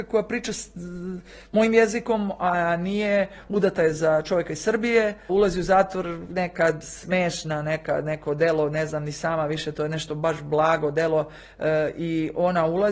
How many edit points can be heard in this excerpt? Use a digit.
1